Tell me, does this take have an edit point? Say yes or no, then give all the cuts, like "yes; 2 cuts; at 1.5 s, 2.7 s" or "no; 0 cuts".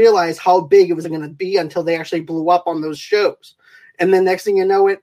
yes; 1 cut; at 1.0 s